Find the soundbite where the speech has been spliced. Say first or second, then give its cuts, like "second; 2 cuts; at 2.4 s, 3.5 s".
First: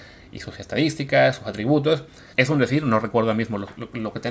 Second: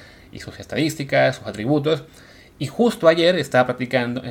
first; 1 cut; at 2.3 s